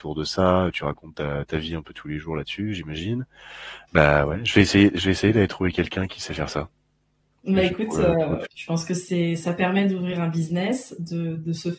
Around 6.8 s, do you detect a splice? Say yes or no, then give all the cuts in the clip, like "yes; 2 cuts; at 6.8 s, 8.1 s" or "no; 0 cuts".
no; 2 cuts; at 3.9 s, 8.4 s